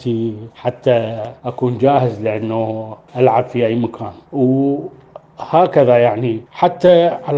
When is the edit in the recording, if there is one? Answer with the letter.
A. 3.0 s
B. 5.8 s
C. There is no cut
A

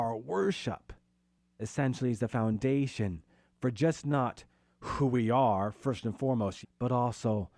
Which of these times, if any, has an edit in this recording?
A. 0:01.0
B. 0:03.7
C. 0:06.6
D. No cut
C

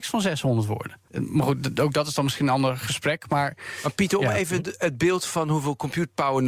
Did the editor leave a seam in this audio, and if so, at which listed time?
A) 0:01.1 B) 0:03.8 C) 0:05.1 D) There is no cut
A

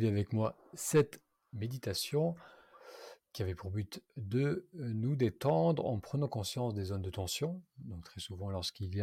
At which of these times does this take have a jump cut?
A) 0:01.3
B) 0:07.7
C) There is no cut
C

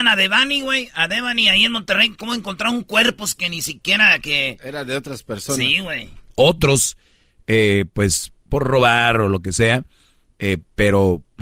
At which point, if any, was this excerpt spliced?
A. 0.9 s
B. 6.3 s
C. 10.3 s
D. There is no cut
B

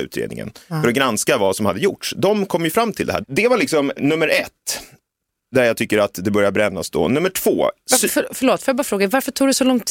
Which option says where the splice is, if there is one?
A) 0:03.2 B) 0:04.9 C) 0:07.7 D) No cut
A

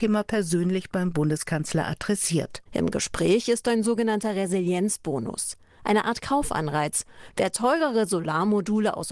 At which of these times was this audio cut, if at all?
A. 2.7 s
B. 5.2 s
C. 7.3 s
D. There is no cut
A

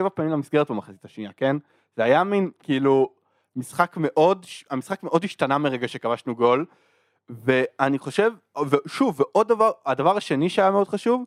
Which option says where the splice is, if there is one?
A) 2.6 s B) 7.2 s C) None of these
C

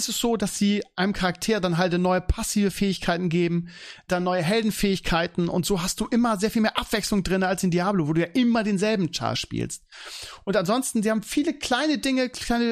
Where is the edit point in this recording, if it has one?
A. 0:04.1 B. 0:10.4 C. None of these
A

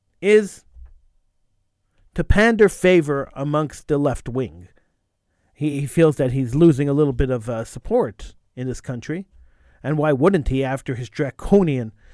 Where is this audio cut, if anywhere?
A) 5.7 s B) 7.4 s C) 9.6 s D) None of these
D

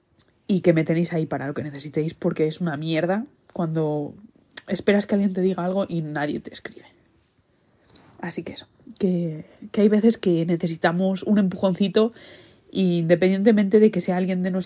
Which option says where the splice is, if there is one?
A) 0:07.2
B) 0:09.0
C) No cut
C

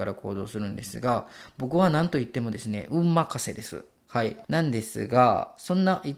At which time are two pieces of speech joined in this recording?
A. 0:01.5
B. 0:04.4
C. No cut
B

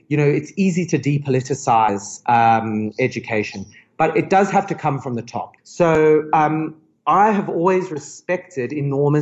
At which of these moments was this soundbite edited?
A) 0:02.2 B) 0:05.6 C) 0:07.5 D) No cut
B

